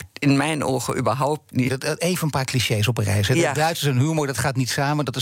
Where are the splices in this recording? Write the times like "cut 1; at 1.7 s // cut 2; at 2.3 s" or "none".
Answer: cut 1; at 1.7 s